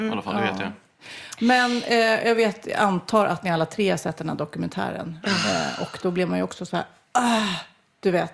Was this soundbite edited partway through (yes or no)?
no